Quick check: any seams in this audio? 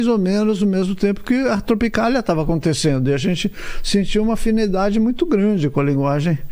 no; 0 cuts

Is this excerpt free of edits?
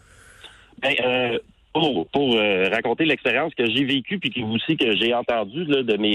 yes; 0 cuts

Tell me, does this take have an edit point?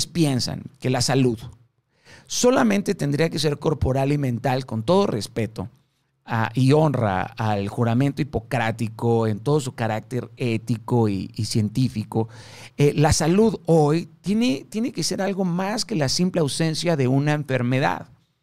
no; 0 cuts

